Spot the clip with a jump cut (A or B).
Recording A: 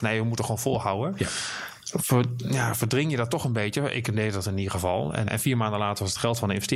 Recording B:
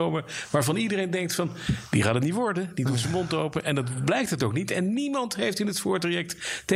A